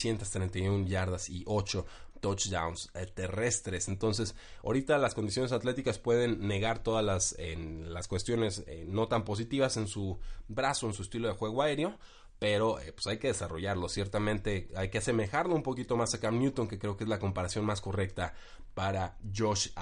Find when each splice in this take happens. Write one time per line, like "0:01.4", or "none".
none